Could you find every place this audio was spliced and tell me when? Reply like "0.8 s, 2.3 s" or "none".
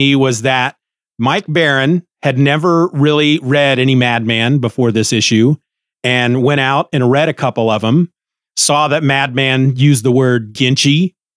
none